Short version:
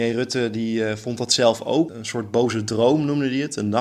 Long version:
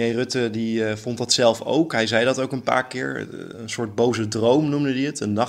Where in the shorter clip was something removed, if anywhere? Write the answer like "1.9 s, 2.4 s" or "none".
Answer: 1.9 s